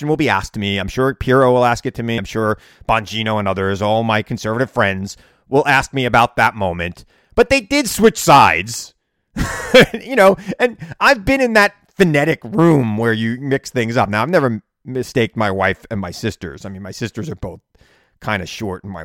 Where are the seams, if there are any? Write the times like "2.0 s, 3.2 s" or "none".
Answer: 2.2 s